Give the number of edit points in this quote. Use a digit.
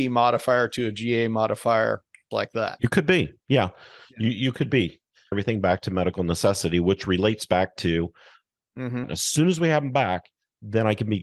3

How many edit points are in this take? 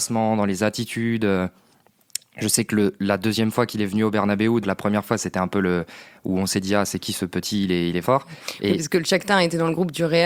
2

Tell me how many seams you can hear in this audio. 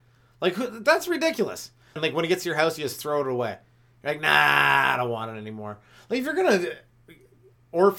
1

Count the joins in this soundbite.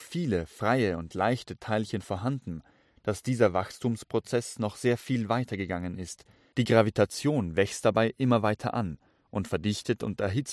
0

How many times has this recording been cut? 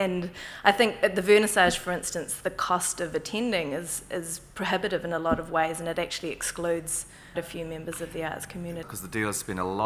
2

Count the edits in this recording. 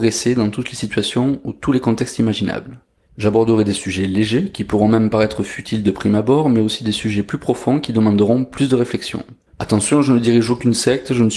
2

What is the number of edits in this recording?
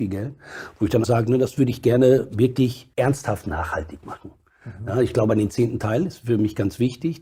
2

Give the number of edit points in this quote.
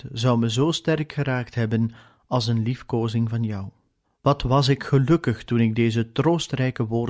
1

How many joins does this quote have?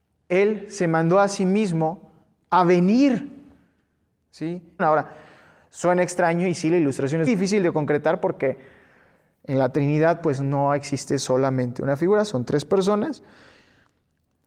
2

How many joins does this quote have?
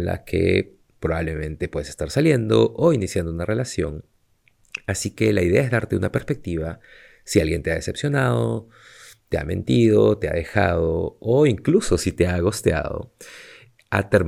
0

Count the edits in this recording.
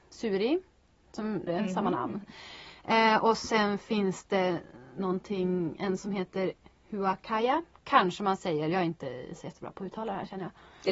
1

